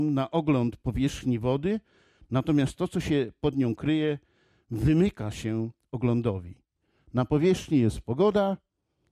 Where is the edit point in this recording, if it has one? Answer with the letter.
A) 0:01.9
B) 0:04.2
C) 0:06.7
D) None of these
D